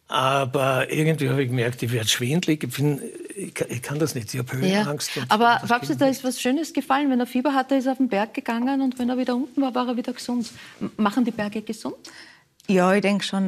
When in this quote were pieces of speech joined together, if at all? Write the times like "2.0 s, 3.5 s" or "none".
none